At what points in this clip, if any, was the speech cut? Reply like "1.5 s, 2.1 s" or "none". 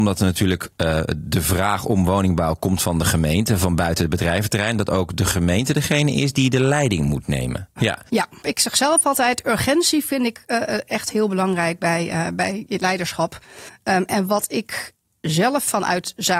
7.8 s